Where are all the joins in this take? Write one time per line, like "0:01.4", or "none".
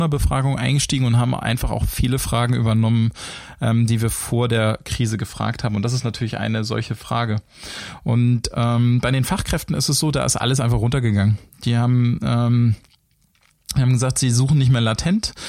none